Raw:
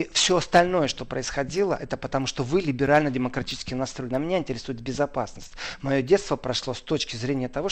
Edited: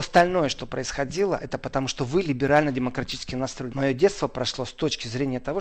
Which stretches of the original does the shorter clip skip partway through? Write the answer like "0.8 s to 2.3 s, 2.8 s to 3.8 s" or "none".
4.1 s to 5.8 s